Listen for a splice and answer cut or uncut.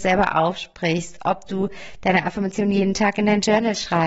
uncut